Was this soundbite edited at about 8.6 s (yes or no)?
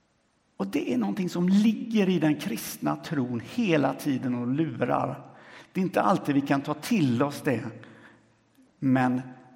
no